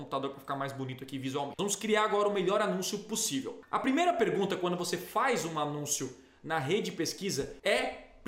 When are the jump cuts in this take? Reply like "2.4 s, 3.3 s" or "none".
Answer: 1.6 s